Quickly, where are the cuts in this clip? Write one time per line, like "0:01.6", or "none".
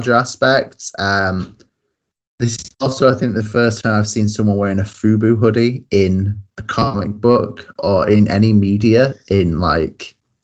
none